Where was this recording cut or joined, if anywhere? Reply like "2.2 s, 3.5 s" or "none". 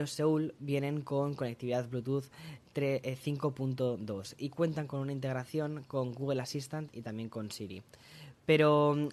none